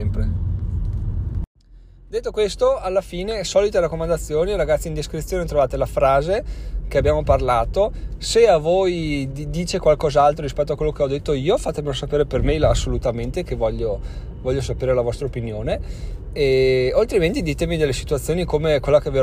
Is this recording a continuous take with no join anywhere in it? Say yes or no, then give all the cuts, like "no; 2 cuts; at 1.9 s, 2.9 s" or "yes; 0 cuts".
yes; 0 cuts